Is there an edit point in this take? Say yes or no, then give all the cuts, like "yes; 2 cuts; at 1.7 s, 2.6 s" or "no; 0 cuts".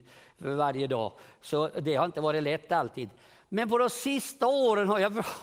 no; 0 cuts